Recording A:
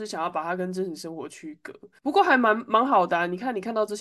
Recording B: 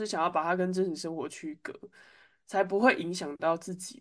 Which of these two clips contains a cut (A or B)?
A